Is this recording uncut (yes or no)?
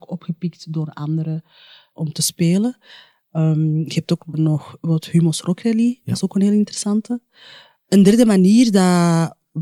no